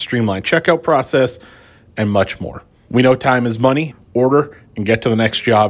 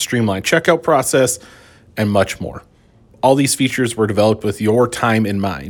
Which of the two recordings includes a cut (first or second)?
first